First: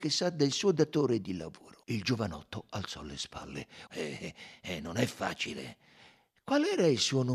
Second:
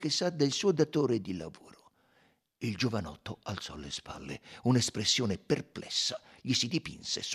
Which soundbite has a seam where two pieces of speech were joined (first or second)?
first